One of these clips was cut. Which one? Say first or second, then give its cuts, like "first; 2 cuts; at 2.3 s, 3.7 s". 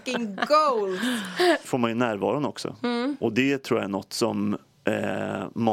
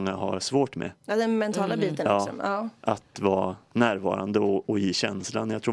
first; 1 cut; at 1.7 s